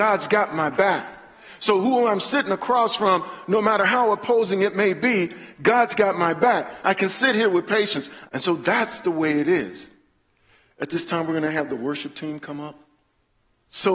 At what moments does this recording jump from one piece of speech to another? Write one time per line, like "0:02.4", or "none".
0:06.8
0:08.2